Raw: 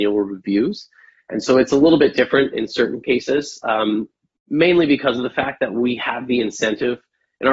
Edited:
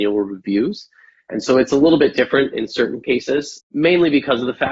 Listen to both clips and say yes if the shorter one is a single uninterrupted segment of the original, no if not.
no